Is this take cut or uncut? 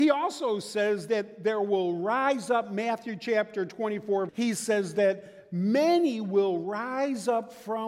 cut